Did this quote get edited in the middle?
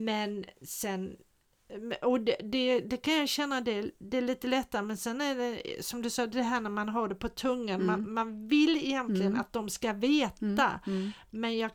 no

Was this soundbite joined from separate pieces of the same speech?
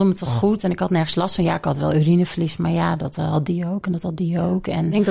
no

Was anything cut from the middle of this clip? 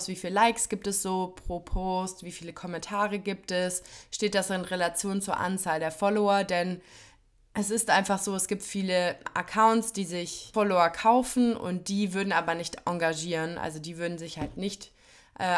no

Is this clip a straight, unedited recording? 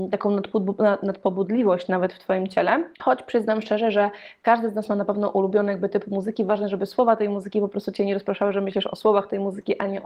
no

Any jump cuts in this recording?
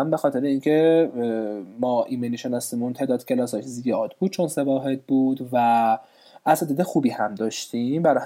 no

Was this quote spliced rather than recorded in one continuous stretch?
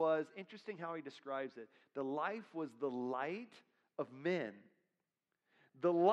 no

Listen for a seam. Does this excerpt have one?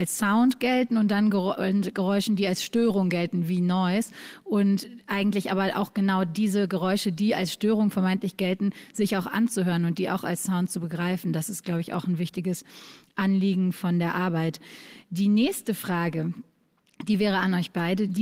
no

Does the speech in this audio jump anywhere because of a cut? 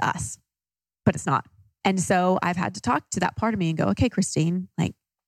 yes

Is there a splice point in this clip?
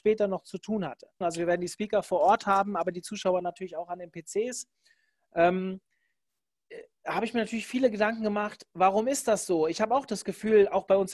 yes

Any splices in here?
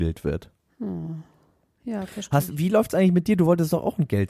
no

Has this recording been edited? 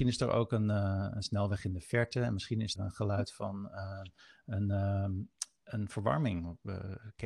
yes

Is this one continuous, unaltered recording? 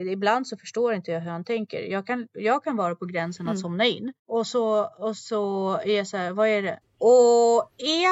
no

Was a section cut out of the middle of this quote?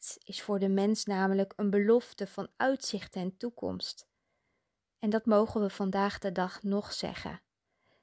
no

